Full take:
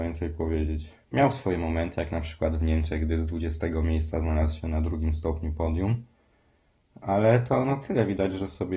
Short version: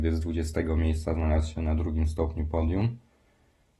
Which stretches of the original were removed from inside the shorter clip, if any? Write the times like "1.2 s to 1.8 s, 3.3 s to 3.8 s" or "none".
none